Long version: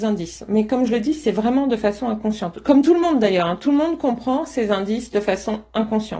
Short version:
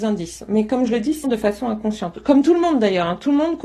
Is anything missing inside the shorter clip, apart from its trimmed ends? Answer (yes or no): yes